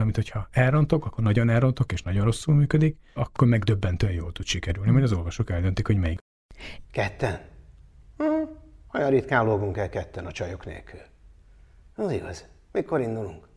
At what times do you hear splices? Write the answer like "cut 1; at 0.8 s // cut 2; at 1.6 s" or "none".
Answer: cut 1; at 3.2 s // cut 2; at 6.8 s

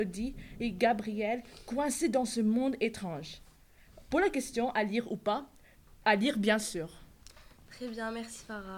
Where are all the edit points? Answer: none

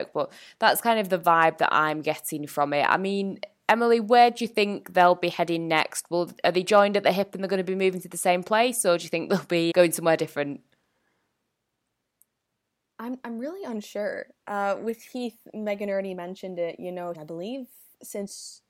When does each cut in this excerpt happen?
cut 1; at 9.7 s // cut 2; at 17.1 s

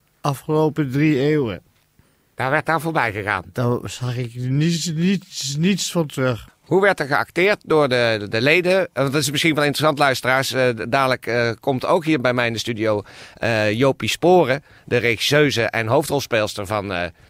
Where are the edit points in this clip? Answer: cut 1; at 6.5 s

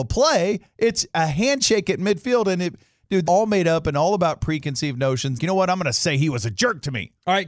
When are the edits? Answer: cut 1; at 3.2 s // cut 2; at 5.3 s

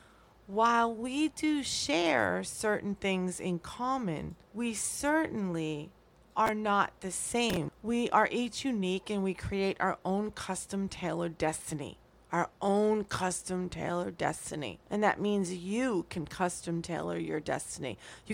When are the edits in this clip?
cut 1; at 4.4 s // cut 2; at 7.7 s // cut 3; at 14.8 s

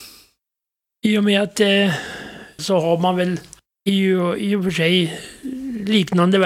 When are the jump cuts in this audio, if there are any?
cut 1; at 2.6 s

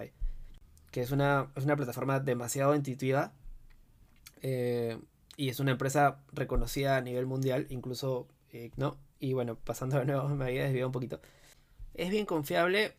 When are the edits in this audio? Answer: cut 1; at 8.7 s

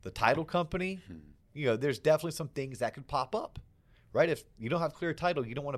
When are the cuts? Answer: none

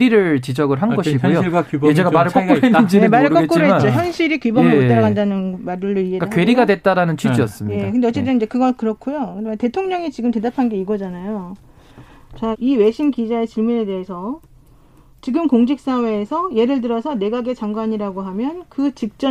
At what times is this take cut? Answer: cut 1; at 12.5 s

